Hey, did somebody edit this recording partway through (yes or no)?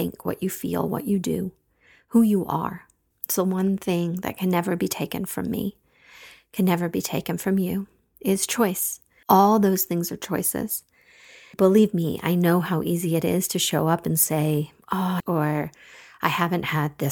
yes